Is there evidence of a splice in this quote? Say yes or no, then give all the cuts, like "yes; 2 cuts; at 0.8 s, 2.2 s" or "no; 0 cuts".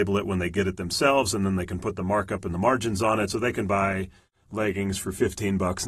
no; 0 cuts